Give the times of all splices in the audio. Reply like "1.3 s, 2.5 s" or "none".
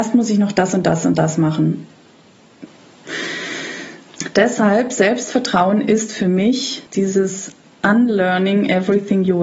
2.7 s, 6.9 s